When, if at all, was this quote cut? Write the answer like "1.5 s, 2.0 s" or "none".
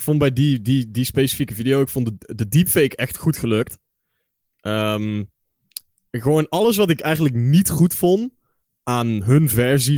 none